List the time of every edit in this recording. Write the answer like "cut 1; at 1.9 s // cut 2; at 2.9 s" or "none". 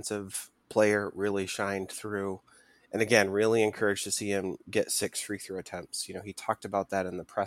none